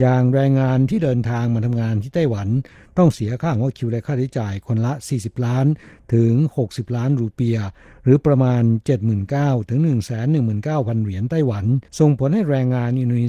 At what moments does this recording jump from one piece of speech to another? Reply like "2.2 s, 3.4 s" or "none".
11.9 s